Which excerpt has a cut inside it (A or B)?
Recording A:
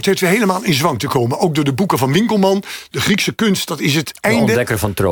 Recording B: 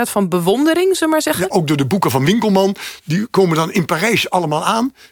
B